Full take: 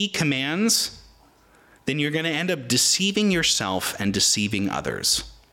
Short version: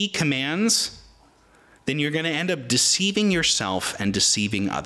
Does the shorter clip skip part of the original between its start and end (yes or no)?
no